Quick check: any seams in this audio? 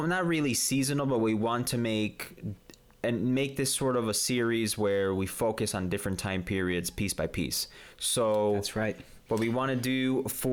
no; 0 cuts

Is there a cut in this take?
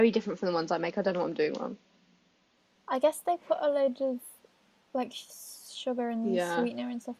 no; 0 cuts

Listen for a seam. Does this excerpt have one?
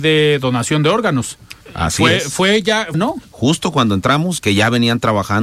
yes; 3 cuts; at 1.6 s, 2.9 s, 4.4 s

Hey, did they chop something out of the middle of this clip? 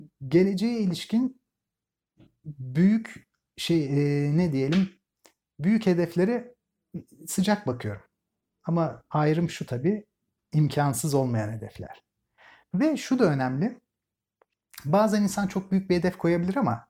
no; 0 cuts

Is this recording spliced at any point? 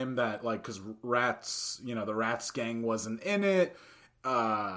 no; 0 cuts

